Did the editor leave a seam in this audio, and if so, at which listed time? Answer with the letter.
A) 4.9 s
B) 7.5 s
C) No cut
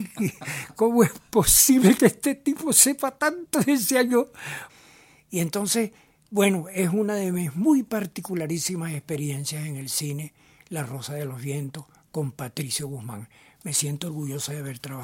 C